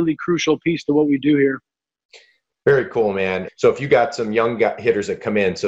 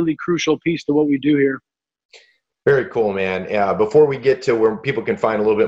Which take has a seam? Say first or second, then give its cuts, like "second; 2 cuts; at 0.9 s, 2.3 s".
first; 1 cut; at 3.5 s